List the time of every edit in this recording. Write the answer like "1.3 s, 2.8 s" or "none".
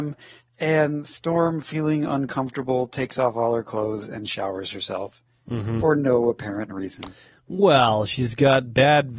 none